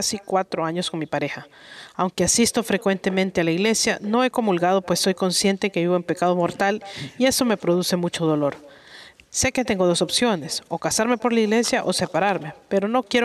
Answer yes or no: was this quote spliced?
no